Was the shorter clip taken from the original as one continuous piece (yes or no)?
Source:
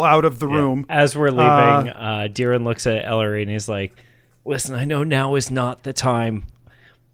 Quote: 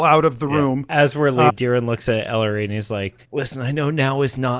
no